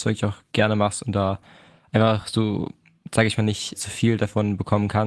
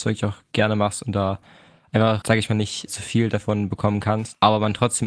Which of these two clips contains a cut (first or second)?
second